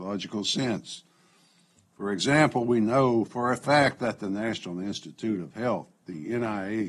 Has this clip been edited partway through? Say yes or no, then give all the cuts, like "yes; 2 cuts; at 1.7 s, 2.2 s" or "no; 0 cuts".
no; 0 cuts